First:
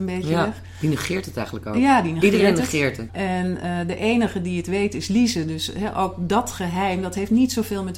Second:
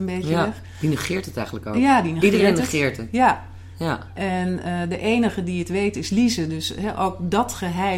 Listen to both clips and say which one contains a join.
first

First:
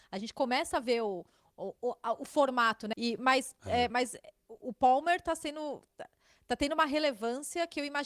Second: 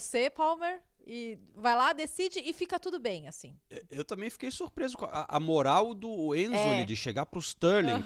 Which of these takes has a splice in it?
first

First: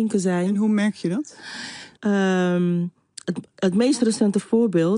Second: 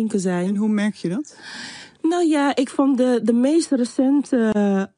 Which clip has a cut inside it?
first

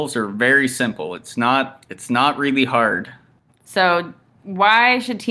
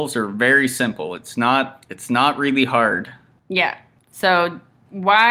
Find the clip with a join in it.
first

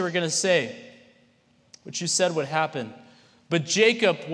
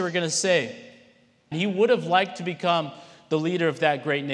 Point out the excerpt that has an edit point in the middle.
second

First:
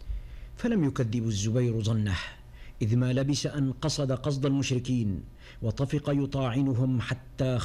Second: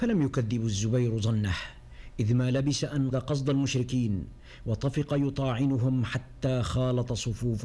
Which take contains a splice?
second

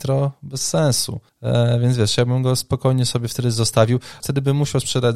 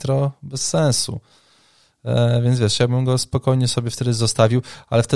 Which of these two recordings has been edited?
first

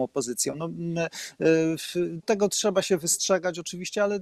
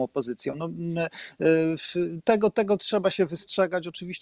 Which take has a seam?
first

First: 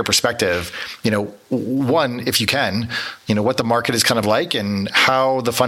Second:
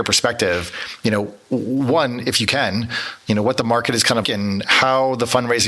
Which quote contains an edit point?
second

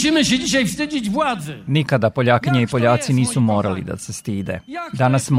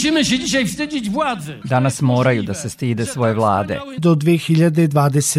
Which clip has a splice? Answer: second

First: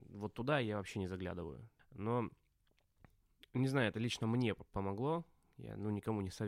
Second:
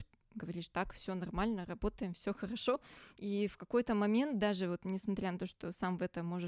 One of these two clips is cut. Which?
first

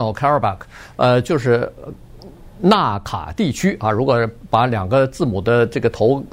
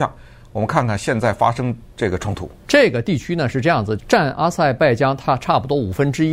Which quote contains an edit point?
second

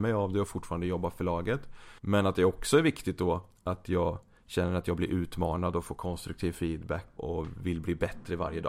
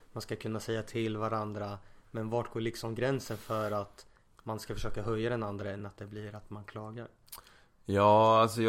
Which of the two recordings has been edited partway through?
first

